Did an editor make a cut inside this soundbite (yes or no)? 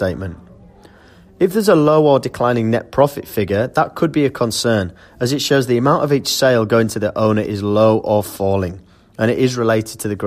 no